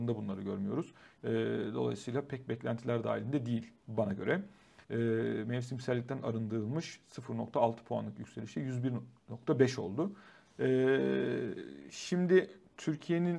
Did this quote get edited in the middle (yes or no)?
yes